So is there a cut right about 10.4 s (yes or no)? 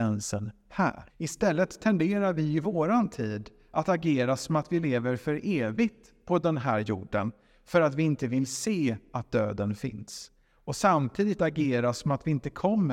no